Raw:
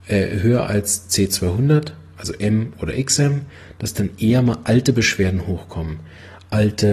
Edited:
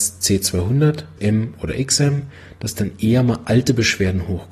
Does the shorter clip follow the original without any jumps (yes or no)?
no